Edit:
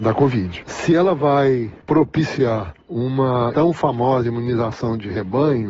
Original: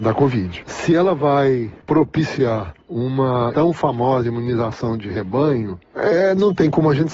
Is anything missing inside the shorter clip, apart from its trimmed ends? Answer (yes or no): no